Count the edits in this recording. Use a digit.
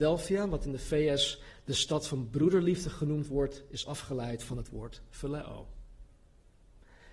0